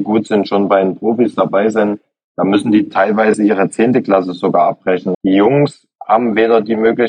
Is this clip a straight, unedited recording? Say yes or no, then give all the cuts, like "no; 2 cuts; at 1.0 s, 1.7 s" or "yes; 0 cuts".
no; 1 cut; at 5.1 s